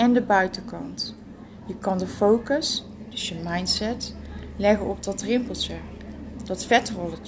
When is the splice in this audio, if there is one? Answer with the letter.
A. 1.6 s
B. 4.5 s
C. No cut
C